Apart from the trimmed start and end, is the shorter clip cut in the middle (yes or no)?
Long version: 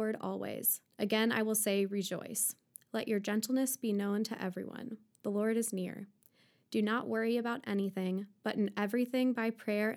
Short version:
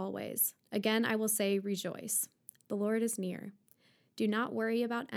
yes